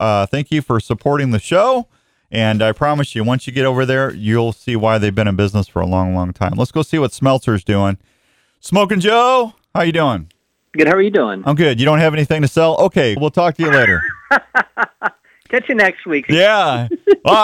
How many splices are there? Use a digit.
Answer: 2